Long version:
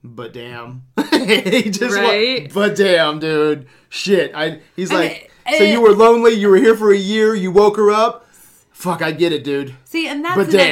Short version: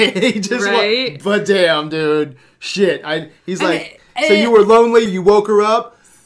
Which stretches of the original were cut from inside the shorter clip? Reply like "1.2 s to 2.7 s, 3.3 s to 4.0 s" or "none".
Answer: 6.4 s to 7.3 s